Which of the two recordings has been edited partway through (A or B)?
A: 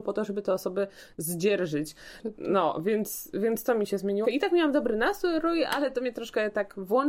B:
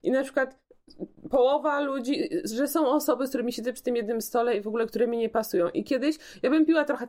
A